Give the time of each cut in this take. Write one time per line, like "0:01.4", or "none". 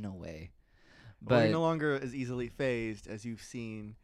none

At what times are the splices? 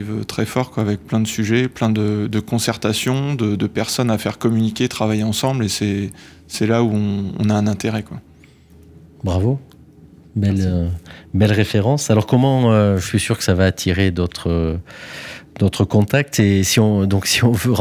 none

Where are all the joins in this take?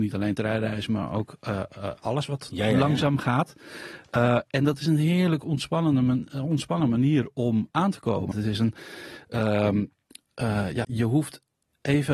0:08.3
0:10.8

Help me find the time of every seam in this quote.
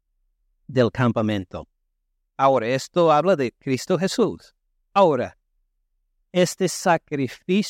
none

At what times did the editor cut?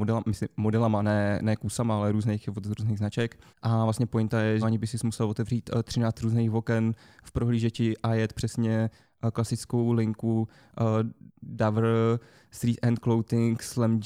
0:03.5
0:04.6

